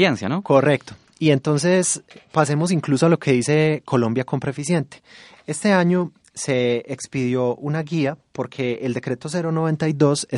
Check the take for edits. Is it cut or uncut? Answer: uncut